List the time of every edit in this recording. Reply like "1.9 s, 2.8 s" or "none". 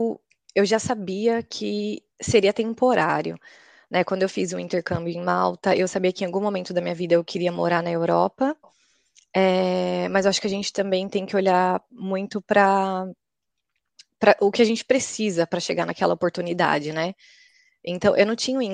2.1 s